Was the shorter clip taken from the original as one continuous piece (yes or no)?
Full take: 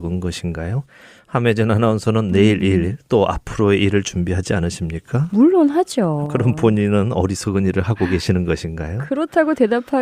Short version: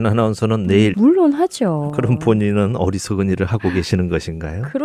no